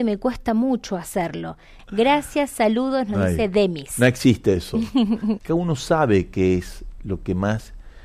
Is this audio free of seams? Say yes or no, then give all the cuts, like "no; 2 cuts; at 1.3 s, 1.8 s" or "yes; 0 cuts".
no; 2 cuts; at 1.8 s, 5.4 s